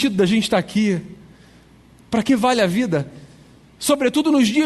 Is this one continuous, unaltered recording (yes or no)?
no